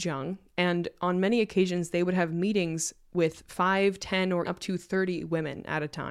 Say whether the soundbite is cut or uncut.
cut